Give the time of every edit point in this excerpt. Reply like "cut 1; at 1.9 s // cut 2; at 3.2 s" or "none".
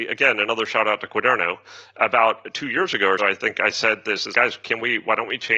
cut 1; at 3.2 s // cut 2; at 4.3 s